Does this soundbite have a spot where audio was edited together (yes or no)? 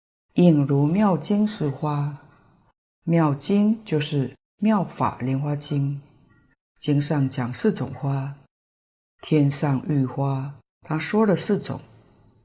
no